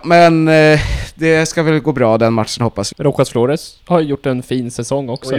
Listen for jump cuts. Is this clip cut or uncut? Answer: cut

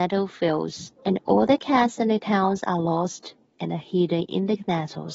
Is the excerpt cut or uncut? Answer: cut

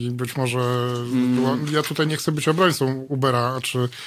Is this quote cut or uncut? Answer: cut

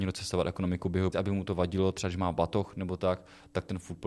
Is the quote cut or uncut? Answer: cut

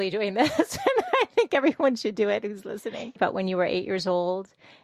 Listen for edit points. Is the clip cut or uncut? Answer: cut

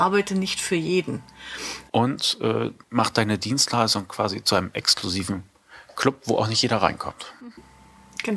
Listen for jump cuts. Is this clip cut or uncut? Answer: cut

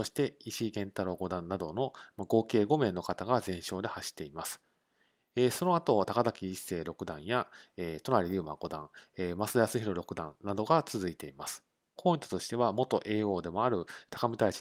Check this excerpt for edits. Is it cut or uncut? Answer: cut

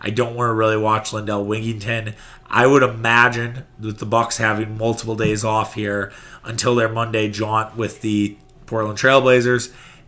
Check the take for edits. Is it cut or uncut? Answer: uncut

